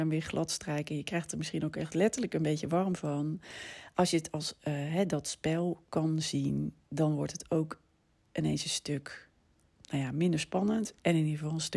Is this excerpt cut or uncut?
uncut